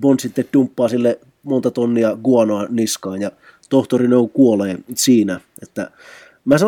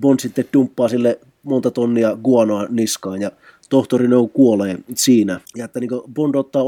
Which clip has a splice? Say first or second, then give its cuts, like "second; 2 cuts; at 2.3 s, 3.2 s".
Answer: second; 1 cut; at 5.4 s